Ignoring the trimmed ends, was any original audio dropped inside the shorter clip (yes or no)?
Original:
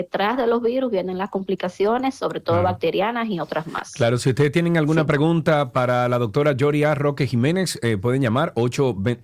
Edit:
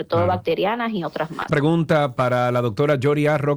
yes